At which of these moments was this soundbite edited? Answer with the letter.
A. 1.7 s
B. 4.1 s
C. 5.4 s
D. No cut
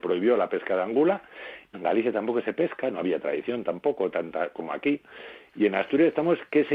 A